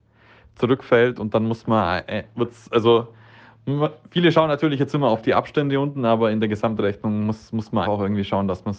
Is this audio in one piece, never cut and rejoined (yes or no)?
no